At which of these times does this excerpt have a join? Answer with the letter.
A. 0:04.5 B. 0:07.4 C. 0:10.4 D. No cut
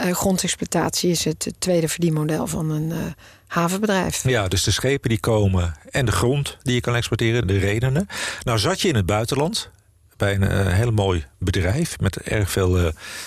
B